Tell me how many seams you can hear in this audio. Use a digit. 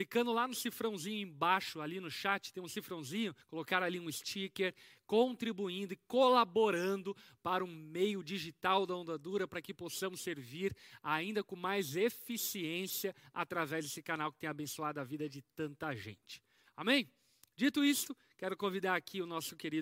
1